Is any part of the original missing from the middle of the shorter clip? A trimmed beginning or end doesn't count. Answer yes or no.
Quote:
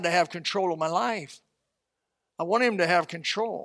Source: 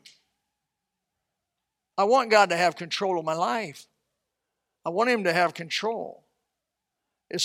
no